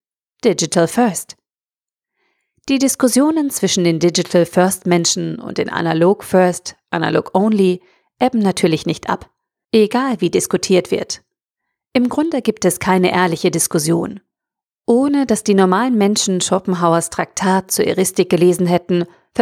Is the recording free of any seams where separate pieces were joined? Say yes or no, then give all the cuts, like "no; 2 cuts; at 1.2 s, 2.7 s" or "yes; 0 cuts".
no; 1 cut; at 9.6 s